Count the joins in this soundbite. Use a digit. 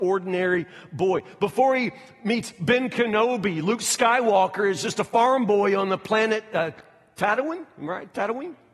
0